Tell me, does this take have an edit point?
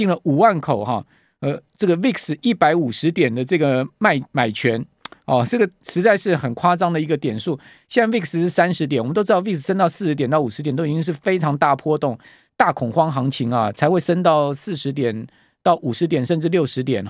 no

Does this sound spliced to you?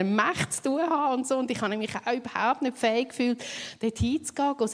no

